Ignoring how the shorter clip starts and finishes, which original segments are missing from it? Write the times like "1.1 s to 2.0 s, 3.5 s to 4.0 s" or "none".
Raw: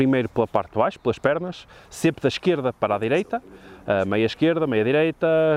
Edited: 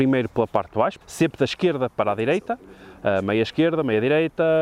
1.0 s to 1.8 s